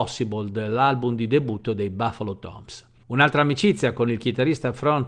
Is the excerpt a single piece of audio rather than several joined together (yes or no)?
no